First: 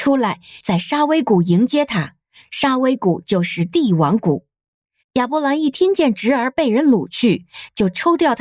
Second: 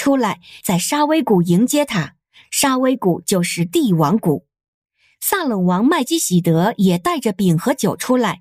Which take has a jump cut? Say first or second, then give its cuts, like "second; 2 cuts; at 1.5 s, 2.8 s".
first; 1 cut; at 5.0 s